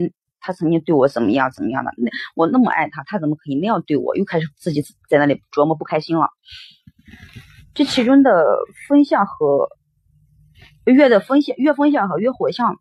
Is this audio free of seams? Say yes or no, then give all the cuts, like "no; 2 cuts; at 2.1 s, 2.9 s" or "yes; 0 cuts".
yes; 0 cuts